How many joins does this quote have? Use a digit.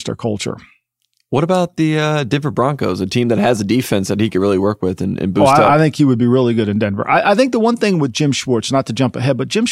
0